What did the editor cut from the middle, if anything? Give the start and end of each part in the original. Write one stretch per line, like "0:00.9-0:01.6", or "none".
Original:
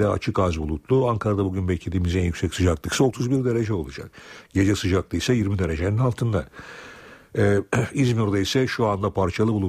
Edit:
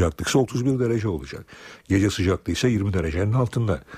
none